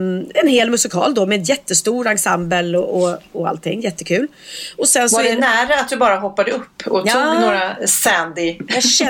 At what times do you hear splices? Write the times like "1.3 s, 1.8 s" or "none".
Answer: none